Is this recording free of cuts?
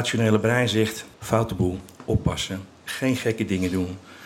no; 1 cut; at 1.1 s

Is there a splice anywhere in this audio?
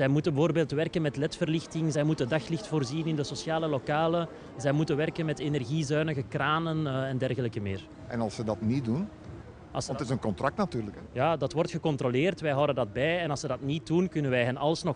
no; 0 cuts

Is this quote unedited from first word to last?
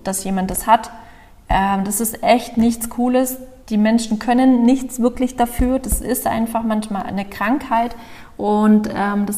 no; 1 cut; at 3.6 s

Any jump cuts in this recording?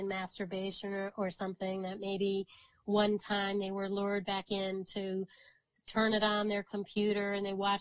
no; 0 cuts

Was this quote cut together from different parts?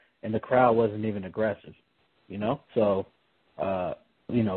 yes; 1 cut; at 2.6 s

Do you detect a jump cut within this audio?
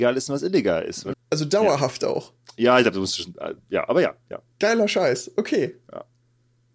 yes; 1 cut; at 1.1 s

